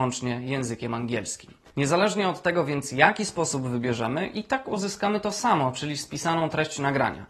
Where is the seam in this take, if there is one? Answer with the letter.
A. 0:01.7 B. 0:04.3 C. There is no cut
C